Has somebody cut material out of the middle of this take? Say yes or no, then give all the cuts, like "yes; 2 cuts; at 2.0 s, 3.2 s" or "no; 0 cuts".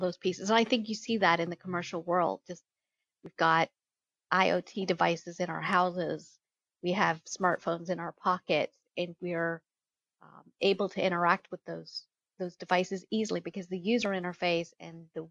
no; 0 cuts